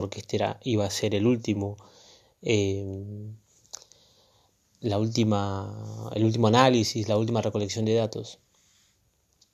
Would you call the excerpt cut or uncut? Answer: uncut